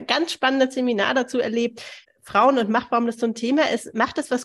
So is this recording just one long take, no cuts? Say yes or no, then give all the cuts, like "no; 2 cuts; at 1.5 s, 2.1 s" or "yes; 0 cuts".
no; 1 cut; at 2.0 s